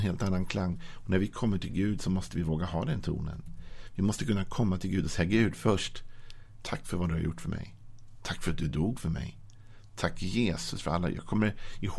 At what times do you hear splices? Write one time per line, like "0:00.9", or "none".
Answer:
0:06.6